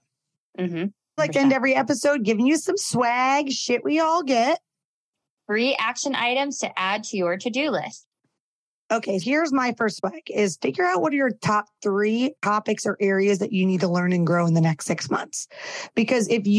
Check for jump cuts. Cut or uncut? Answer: cut